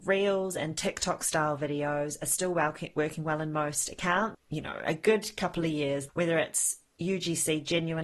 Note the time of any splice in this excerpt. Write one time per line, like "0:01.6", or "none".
0:04.3
0:06.1